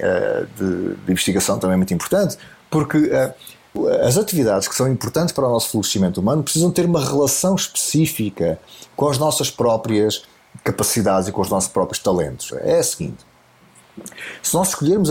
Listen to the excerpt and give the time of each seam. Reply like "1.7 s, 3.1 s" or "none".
12.5 s